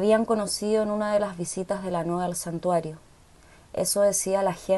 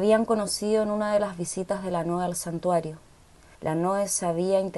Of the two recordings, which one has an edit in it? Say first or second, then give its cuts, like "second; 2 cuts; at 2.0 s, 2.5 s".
second; 1 cut; at 3.5 s